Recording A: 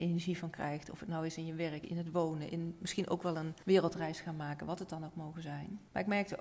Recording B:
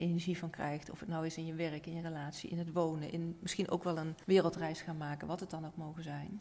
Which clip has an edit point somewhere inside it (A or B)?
A